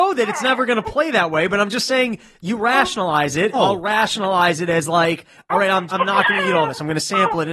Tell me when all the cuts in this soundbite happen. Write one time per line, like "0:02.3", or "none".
0:03.5
0:05.9